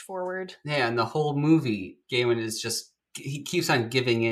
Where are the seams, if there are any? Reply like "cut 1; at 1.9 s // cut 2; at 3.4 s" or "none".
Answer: cut 1; at 2.0 s